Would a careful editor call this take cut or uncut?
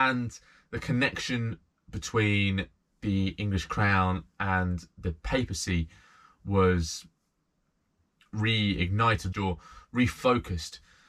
cut